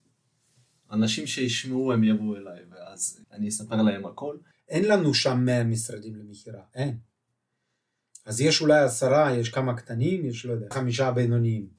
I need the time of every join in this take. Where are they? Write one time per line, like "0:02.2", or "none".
0:03.2
0:04.5
0:10.7